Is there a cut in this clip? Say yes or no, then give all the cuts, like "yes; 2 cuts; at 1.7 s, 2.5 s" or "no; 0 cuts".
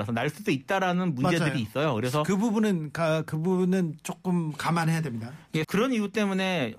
yes; 1 cut; at 5.6 s